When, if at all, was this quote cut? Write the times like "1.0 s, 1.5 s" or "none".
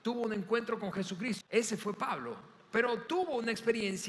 1.4 s, 2.7 s